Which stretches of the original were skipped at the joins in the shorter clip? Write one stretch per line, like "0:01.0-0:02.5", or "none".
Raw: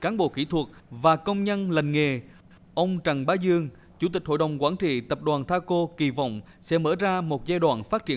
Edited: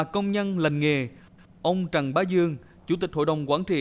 none